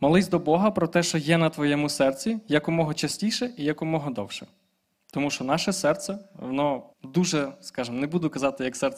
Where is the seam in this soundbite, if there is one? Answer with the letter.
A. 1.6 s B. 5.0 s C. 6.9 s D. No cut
C